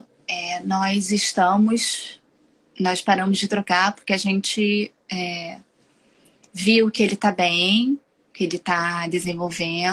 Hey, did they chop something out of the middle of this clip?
no; 0 cuts

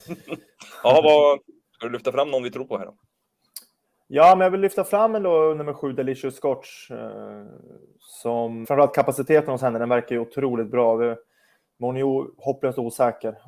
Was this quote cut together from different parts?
yes; 1 cut; at 8.6 s

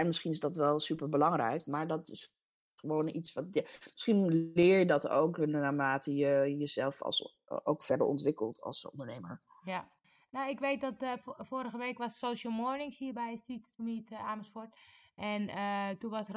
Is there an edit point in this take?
no; 0 cuts

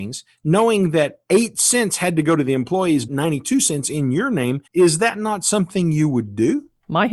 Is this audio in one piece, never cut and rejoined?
no; 2 cuts; at 3.1 s, 4.7 s

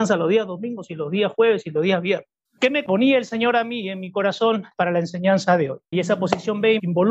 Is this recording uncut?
no; 2 cuts; at 2.4 s, 5.9 s

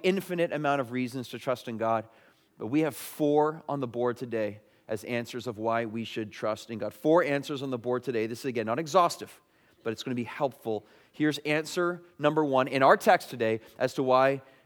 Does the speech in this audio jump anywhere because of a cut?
no; 0 cuts

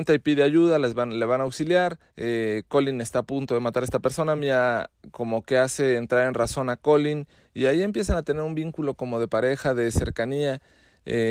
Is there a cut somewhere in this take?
no; 0 cuts

